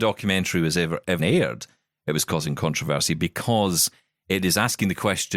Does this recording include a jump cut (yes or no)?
yes